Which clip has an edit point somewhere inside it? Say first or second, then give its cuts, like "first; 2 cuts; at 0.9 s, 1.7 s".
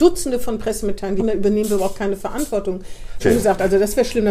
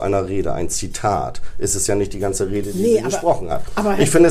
first; 2 cuts; at 1.2 s, 3.2 s